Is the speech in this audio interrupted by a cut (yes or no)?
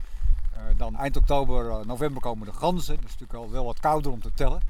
yes